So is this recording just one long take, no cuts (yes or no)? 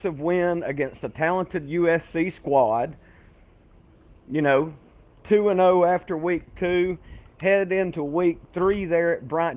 yes